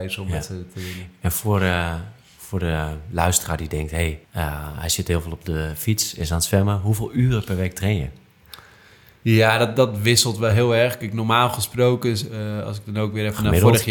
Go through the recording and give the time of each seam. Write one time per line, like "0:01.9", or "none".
0:04.2